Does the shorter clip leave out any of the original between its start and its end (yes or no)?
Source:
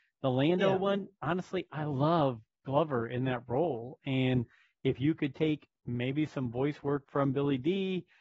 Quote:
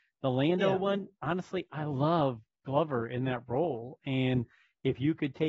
no